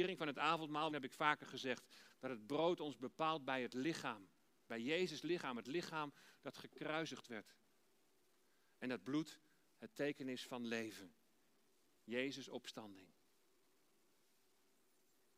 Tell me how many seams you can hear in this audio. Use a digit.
1